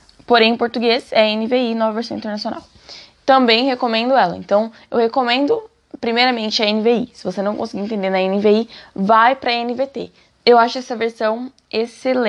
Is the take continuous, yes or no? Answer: no